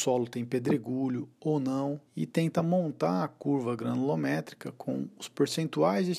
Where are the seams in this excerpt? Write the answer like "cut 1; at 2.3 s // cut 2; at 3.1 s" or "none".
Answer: cut 1; at 2.1 s